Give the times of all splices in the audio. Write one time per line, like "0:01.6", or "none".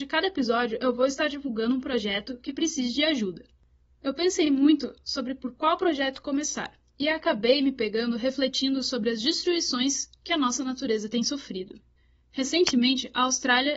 none